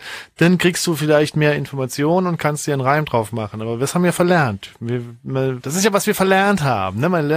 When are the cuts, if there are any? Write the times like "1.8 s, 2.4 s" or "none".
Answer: 5.6 s

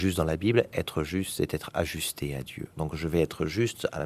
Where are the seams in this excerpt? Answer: 2.8 s

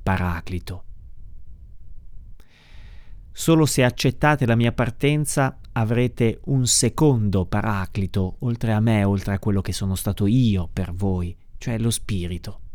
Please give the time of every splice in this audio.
none

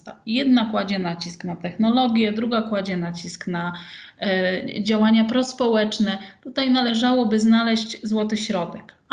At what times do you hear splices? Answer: none

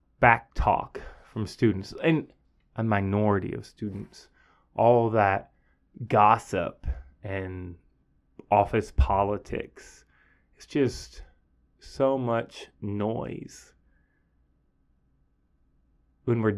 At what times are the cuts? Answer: none

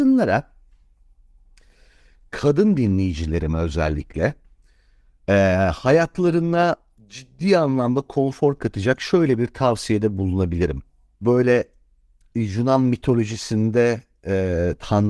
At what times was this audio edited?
11.1 s

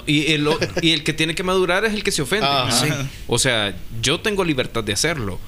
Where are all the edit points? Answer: none

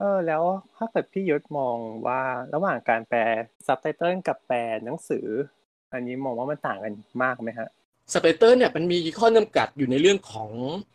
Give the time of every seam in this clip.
3.5 s

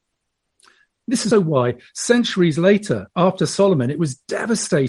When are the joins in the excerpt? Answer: 1.3 s

